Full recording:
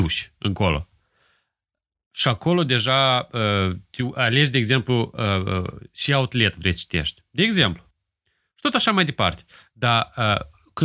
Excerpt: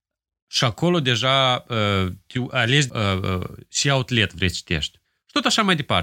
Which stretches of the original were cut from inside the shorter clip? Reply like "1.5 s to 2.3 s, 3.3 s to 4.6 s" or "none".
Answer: 4.5 s to 5.1 s, 7.3 s to 8.3 s